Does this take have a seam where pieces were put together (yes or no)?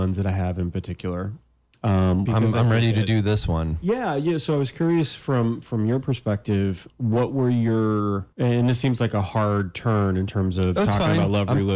yes